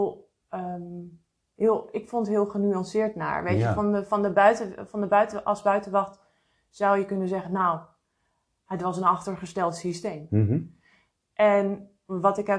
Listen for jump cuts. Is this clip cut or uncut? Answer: uncut